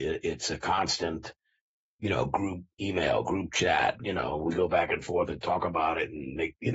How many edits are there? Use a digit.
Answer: 2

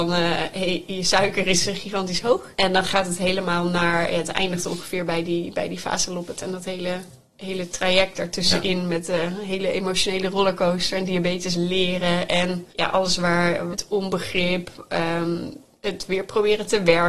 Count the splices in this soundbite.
2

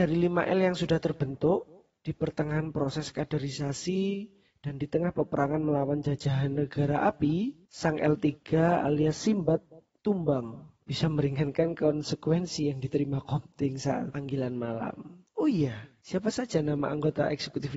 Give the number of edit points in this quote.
1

